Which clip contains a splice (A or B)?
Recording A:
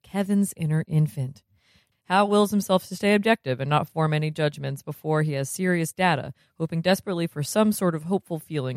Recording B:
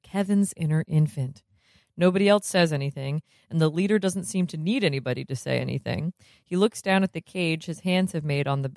A